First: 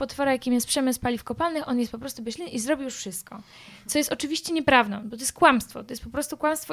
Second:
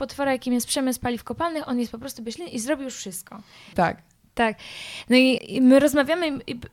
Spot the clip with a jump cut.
second; 2 cuts; at 3.7 s, 5.4 s

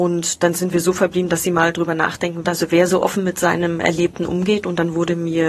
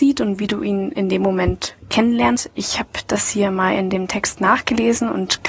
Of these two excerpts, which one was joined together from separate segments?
first; 1 cut; at 2.4 s

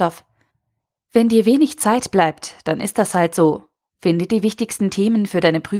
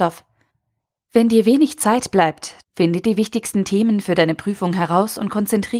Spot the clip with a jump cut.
second; 1 cut; at 2.6 s

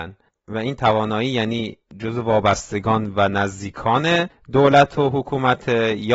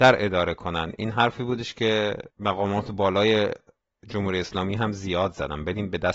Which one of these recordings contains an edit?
second; 1 cut; at 2.3 s

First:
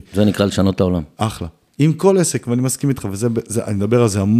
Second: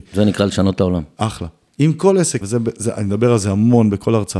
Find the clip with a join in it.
second; 1 cut; at 2.4 s

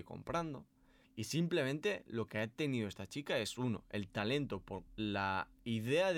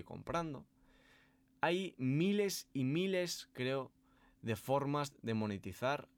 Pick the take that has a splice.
first; 2 cuts; at 1.0 s, 4.9 s

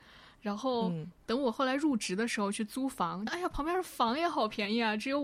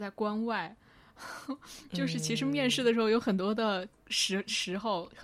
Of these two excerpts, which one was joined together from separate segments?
first; 1 cut; at 3.3 s

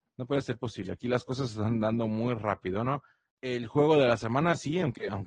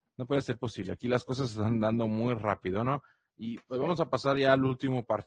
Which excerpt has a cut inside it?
first; 1 cut; at 3.3 s

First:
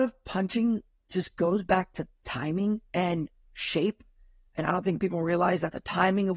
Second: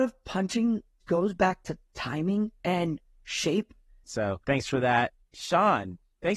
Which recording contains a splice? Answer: second; 2 cuts; at 1.0 s, 4.0 s

